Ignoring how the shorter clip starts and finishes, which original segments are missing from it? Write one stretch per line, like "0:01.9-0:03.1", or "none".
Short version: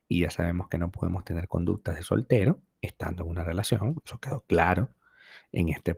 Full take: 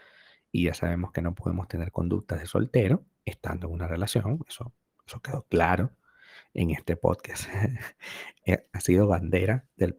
0:04.4-0:05.0